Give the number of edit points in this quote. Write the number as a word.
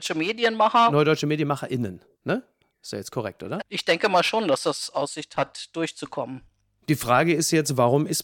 one